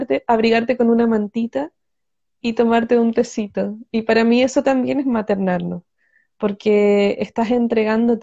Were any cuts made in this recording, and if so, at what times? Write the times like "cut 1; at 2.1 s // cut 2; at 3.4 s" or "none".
none